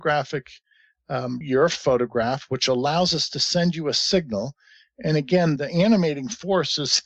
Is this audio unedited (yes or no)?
no